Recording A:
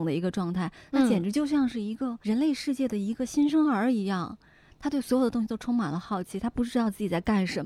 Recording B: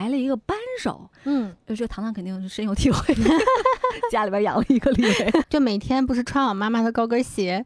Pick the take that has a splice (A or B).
B